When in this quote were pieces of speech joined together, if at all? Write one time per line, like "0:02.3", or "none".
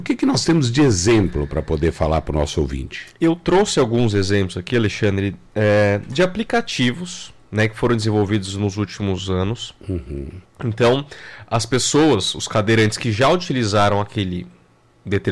0:10.4